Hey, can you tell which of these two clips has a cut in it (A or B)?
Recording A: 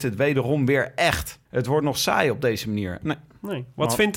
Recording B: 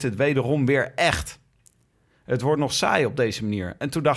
A